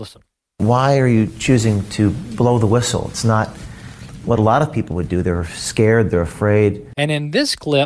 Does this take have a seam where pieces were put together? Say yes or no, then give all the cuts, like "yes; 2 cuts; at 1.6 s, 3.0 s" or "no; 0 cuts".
yes; 1 cut; at 6.9 s